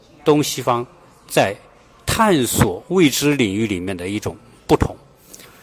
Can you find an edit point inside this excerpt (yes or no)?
no